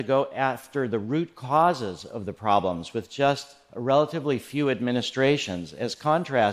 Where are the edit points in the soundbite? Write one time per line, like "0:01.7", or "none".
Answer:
none